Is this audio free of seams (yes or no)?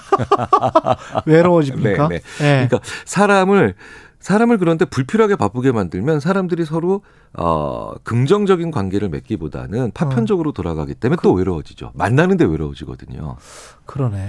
yes